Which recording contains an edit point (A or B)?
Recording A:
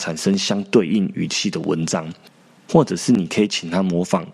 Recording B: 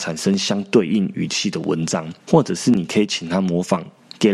B